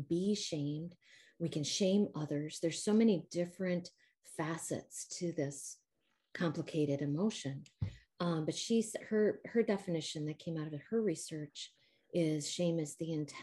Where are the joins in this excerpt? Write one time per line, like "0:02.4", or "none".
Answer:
none